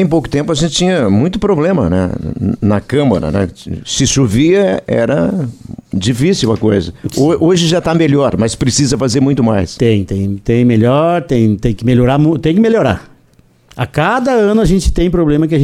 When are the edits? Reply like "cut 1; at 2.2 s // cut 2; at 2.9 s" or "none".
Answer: none